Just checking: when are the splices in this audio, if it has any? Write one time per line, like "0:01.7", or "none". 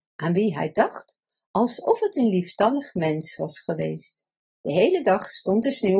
0:04.5